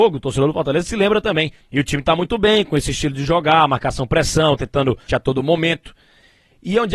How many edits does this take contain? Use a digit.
2